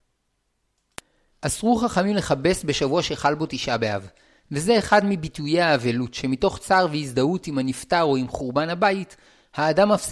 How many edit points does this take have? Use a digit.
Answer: 1